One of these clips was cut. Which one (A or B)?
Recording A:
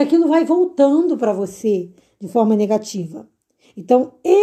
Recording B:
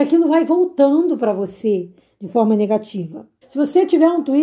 B